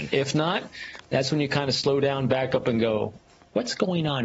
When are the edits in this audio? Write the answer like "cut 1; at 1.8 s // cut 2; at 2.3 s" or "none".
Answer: none